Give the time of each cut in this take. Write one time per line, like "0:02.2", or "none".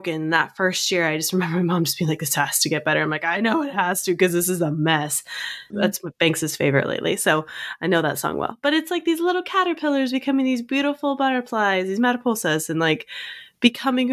0:05.7